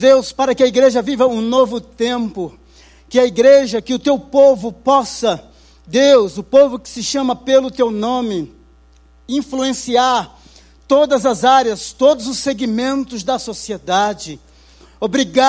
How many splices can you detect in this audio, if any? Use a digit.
0